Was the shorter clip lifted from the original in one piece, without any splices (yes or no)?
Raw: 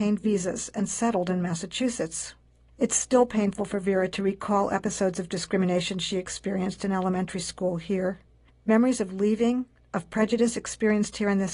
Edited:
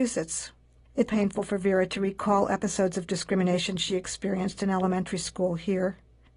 no